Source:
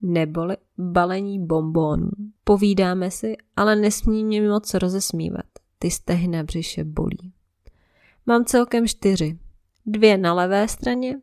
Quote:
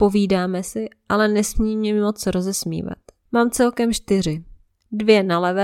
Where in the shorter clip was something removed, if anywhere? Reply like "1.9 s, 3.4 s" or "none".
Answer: 3.3 s